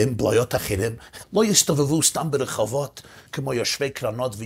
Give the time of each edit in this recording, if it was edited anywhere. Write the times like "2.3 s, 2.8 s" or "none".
1.2 s